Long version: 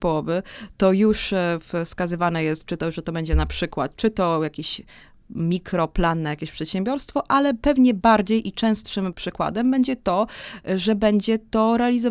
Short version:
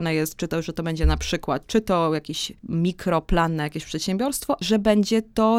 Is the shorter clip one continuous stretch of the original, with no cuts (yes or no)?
no